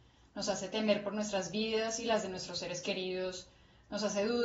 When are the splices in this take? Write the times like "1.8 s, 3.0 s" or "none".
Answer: none

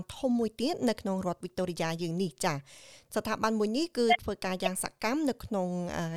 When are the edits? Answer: none

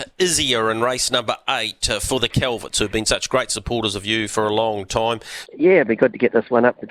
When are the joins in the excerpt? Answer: 5.5 s

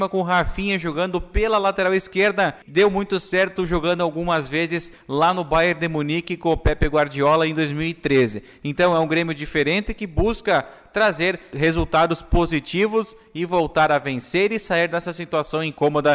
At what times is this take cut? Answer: none

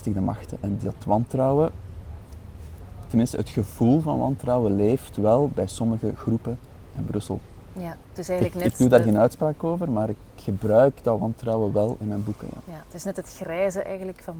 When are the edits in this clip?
none

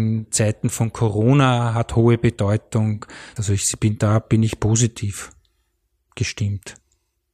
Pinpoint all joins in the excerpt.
3.4 s

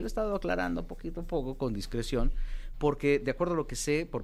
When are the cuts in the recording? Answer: none

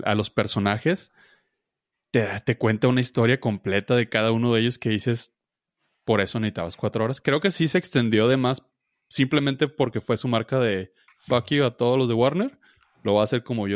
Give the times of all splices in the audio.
none

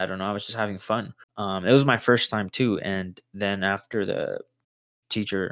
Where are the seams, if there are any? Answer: 1.2 s

